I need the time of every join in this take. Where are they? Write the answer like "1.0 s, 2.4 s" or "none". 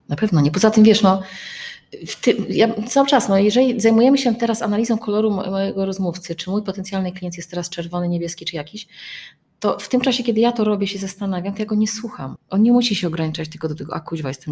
12.4 s